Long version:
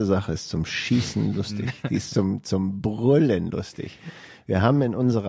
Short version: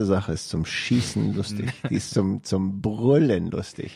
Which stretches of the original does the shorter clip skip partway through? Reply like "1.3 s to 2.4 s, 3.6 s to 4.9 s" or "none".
none